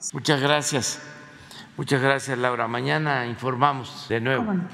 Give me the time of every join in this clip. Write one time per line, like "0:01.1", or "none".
none